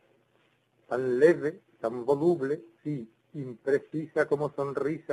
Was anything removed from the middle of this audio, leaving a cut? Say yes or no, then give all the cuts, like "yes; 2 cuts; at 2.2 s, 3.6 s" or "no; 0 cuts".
yes; 1 cut; at 2.8 s